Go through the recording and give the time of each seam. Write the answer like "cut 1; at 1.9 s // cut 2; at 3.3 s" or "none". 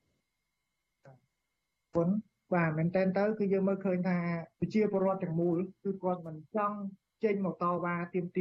cut 1; at 4.5 s